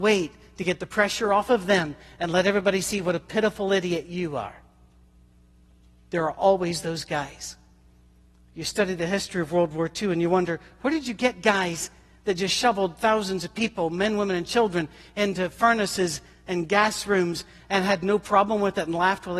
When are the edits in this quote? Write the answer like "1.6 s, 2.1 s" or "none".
none